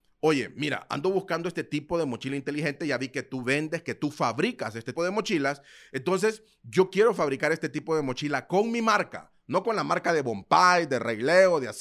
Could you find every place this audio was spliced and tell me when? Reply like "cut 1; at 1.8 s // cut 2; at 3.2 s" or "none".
cut 1; at 5.0 s